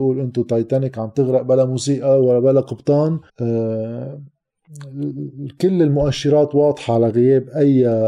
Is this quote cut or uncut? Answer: cut